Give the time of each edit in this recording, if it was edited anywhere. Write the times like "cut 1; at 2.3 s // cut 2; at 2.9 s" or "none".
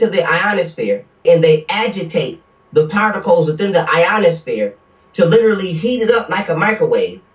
cut 1; at 1.2 s